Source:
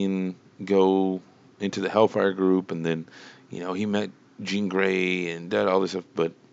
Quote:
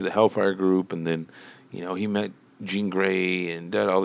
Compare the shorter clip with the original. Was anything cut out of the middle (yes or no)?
no